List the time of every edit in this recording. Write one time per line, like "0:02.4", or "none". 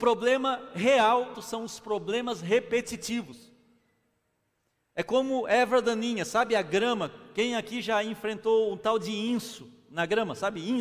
0:01.3